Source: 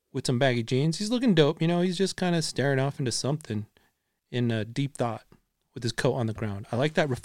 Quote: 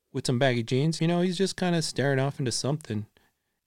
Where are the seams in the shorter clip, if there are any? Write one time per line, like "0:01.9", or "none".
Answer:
0:01.0